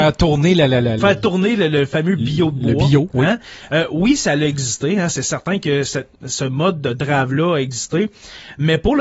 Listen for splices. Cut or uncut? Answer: cut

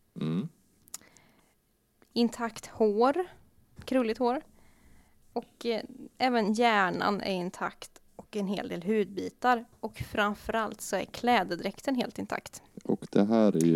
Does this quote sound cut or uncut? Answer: uncut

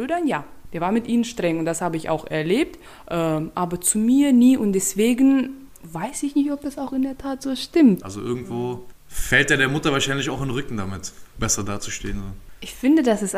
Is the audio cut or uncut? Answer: cut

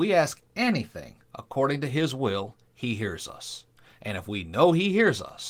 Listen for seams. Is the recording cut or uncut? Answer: uncut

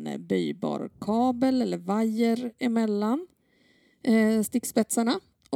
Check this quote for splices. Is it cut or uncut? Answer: uncut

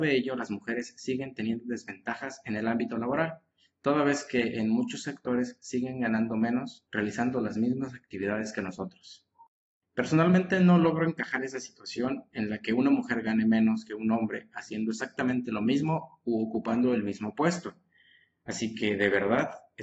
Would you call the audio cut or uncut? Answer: uncut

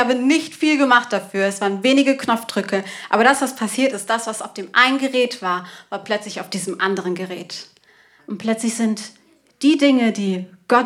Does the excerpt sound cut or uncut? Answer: cut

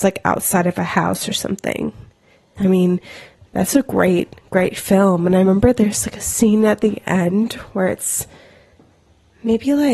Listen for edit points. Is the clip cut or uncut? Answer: cut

